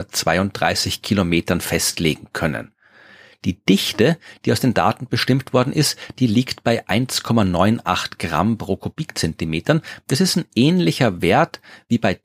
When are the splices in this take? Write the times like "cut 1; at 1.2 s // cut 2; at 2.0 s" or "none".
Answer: none